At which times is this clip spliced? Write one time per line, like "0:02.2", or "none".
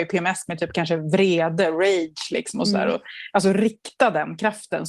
none